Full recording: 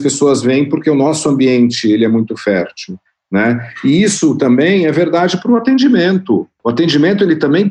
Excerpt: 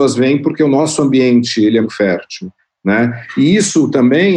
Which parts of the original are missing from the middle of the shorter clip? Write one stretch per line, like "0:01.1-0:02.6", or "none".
0:02.1-0:02.3